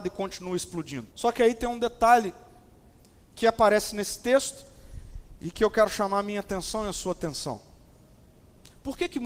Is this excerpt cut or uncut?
cut